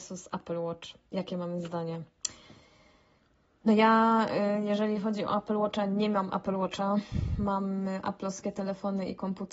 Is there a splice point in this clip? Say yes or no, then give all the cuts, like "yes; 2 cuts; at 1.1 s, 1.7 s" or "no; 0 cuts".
no; 0 cuts